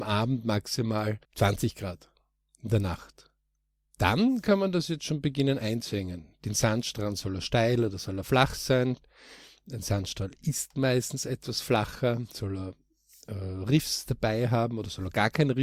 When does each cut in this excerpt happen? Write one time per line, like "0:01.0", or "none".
0:01.2